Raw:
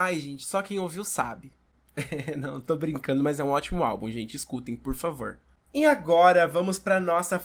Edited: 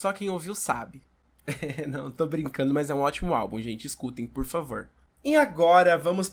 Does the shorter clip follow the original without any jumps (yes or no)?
yes